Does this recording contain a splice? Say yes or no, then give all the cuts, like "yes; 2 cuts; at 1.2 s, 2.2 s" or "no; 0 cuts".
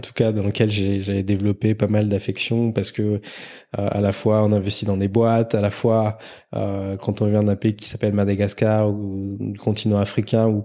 no; 0 cuts